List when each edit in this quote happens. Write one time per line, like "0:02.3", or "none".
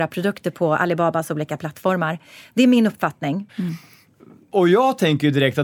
0:03.5